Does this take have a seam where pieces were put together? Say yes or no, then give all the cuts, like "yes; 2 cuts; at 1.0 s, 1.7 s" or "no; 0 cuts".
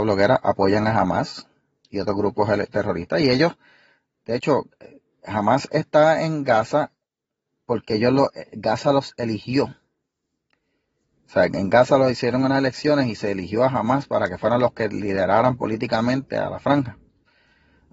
no; 0 cuts